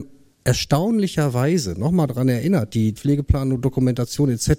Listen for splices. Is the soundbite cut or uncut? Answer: cut